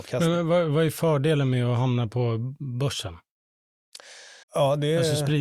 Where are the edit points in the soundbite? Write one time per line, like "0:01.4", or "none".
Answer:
0:04.4